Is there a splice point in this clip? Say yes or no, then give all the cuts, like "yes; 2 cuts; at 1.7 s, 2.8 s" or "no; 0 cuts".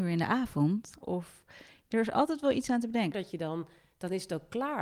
yes; 2 cuts; at 1.0 s, 3.1 s